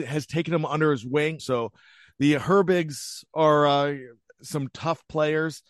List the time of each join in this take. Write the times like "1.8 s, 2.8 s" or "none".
1.4 s